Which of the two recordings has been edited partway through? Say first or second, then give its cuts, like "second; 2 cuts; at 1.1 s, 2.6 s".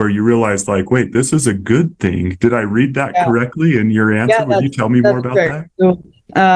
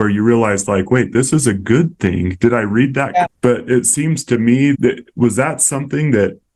second; 2 cuts; at 3.2 s, 4.7 s